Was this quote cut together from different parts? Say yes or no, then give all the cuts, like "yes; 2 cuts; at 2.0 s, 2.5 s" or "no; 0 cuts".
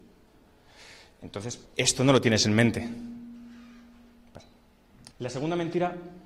yes; 2 cuts; at 1.6 s, 5.1 s